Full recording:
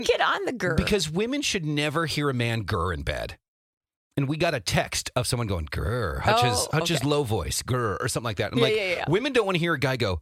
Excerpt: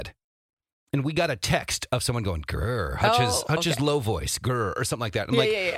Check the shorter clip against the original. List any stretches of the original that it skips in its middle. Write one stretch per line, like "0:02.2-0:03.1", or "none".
none